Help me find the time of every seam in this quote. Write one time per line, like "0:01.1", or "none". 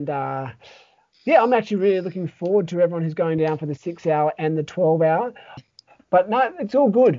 0:05.6